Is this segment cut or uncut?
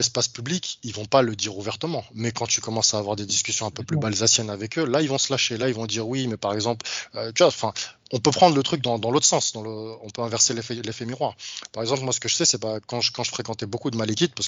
uncut